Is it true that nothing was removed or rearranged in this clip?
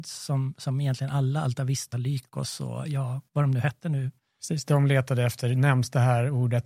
yes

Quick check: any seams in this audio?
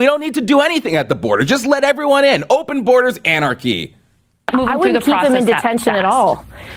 no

